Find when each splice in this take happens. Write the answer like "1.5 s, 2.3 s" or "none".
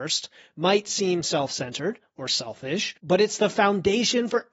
3.0 s